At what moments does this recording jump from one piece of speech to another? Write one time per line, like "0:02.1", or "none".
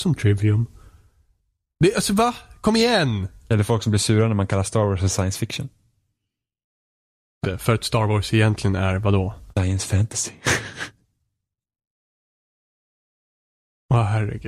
0:07.4
0:09.5